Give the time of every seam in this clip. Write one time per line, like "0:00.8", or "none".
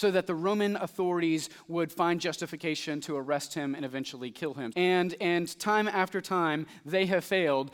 0:04.7